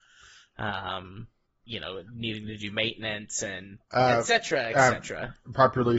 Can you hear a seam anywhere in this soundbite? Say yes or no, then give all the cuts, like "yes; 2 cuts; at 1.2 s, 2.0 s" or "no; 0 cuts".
no; 0 cuts